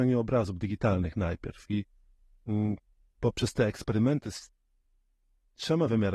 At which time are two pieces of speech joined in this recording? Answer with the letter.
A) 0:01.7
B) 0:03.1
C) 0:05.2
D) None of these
D